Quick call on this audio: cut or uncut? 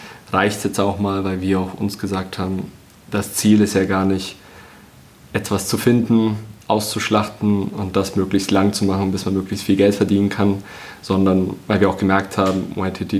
uncut